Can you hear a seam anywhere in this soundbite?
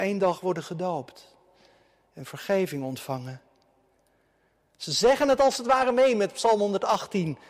no; 0 cuts

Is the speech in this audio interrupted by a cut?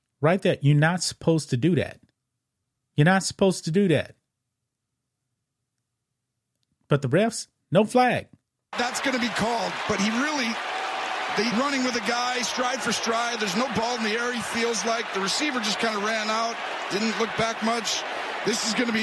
yes; 1 cut; at 11.5 s

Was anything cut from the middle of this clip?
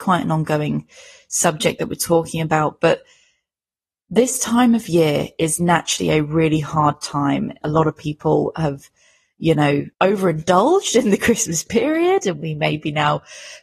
yes; 2 cuts; at 7.6 s, 9.9 s

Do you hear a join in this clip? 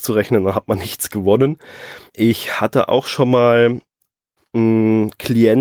yes; 2 cuts; at 2.1 s, 4.4 s

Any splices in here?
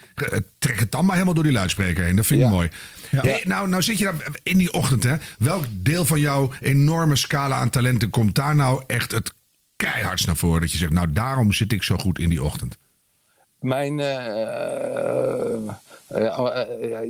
no; 0 cuts

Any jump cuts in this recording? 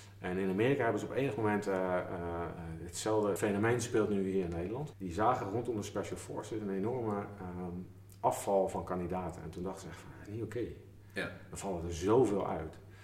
yes; 2 cuts; at 3.4 s, 4.9 s

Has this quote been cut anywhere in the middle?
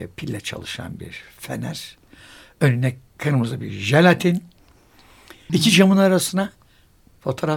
yes; 1 cut; at 5.5 s

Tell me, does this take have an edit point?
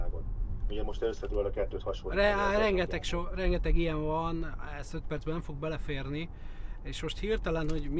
no; 0 cuts

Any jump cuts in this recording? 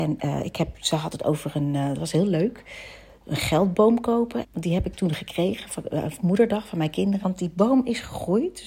yes; 2 cuts; at 4.4 s, 7.2 s

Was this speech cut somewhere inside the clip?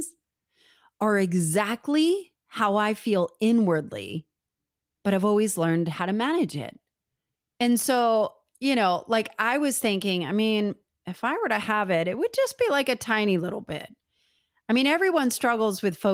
yes; 1 cut; at 7.5 s

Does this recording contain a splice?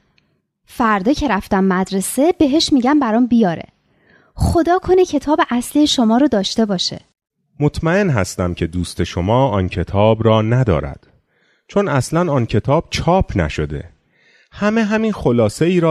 no; 0 cuts

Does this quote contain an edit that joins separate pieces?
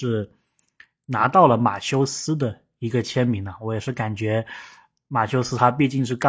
no; 0 cuts

